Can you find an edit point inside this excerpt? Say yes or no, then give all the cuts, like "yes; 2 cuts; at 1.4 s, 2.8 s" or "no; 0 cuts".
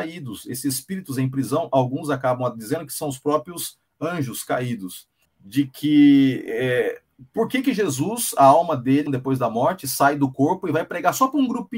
yes; 2 cuts; at 5.3 s, 9.1 s